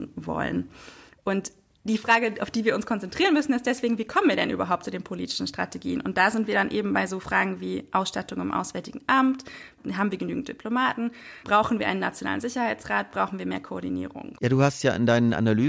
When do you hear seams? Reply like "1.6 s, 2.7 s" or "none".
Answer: none